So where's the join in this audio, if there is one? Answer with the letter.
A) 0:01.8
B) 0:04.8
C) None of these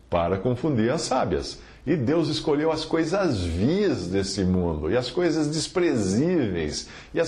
A